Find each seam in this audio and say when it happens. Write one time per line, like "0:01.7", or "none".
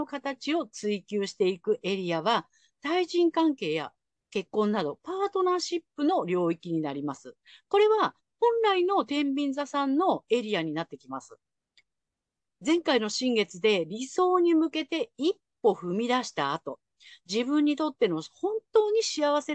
none

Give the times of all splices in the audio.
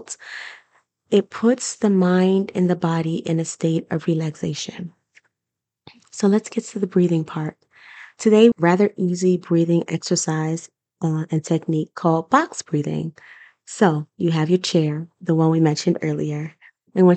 0:08.5

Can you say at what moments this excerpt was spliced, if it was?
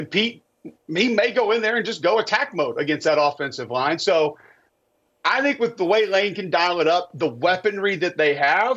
none

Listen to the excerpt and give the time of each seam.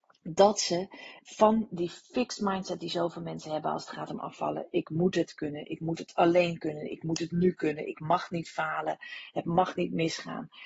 0:01.2

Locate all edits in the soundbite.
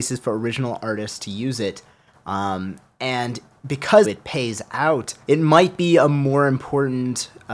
0:04.0
0:05.2

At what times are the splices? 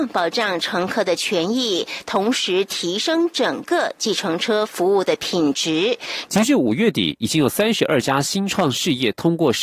0:06.3

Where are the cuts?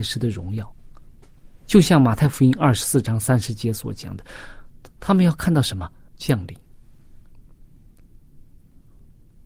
0:06.1

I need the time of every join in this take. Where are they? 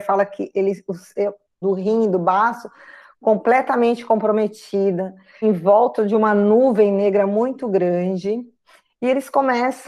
0:01.6
0:05.4

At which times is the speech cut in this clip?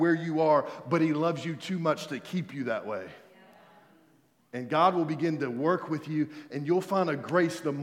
none

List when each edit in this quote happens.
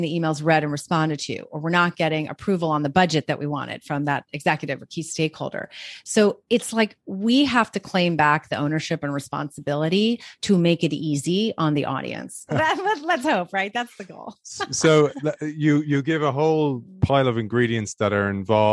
0:12.5

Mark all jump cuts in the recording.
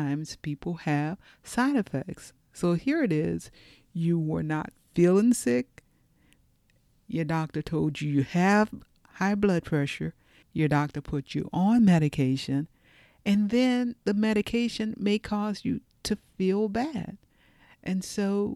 0:10.4

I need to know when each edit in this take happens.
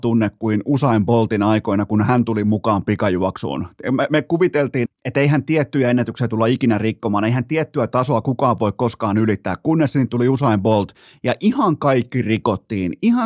0:04.9

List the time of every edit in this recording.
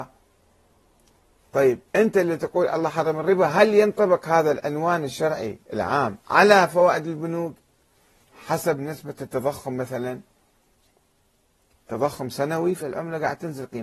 0:01.9
0:12.8

